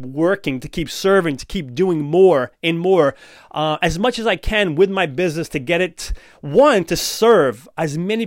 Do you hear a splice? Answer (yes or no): no